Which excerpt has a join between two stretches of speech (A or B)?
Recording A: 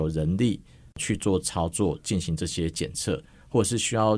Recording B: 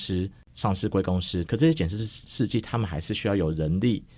B